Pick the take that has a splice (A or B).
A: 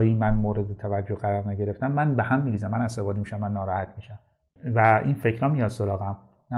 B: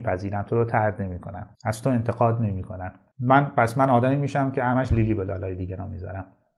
B